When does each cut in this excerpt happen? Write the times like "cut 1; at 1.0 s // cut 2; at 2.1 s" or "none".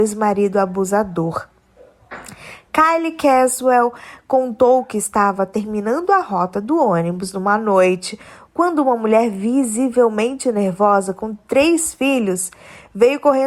none